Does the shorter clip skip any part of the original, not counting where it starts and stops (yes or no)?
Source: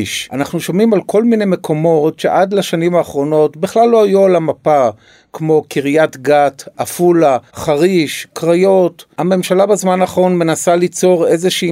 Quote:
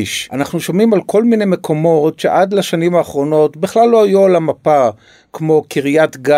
no